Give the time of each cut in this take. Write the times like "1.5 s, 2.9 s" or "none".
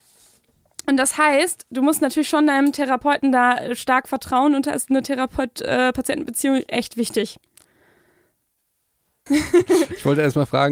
9.3 s